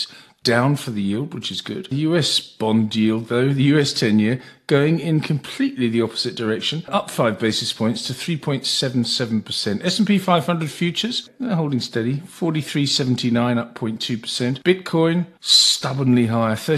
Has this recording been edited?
no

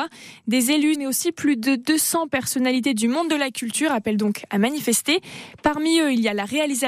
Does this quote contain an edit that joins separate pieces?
yes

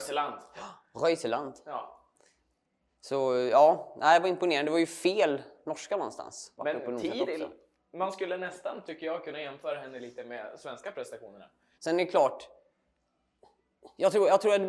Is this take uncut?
no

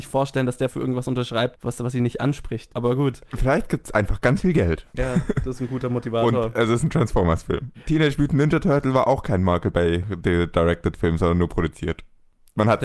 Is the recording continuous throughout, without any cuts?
no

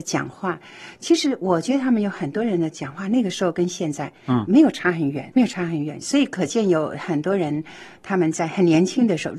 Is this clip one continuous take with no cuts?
no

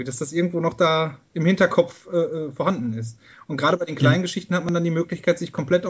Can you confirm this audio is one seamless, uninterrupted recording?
yes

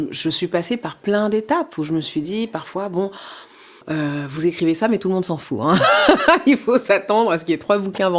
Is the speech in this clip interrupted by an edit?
yes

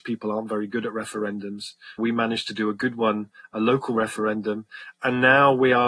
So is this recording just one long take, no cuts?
no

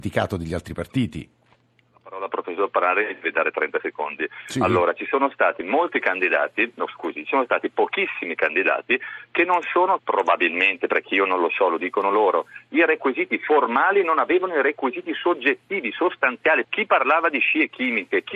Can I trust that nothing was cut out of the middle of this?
no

